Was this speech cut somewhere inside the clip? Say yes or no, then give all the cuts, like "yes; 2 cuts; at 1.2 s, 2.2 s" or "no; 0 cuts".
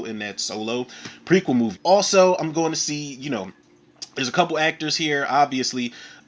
yes; 1 cut; at 1.7 s